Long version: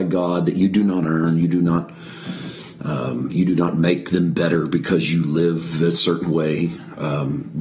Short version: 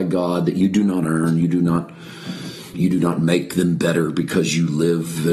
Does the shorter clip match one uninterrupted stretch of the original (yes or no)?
no